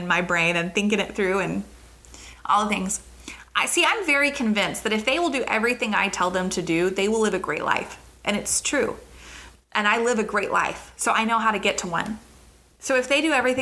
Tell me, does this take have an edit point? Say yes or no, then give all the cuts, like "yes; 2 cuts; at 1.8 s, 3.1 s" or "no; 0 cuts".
yes; 1 cut; at 9.5 s